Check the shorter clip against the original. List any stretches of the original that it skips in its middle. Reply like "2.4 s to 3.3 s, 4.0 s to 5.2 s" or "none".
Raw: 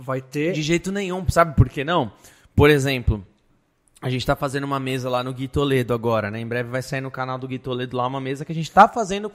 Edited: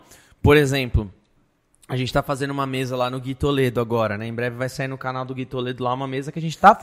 none